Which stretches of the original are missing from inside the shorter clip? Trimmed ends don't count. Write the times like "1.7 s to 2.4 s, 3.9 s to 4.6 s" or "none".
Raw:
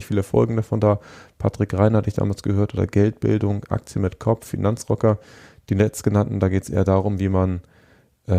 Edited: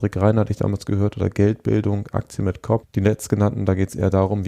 4.4 s to 5.6 s